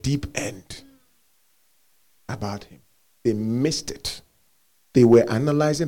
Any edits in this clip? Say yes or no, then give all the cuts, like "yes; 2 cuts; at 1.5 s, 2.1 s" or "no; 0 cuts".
no; 0 cuts